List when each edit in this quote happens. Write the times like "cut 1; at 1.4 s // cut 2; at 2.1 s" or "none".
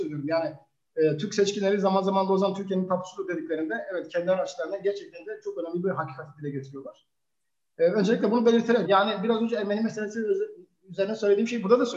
cut 1; at 8.8 s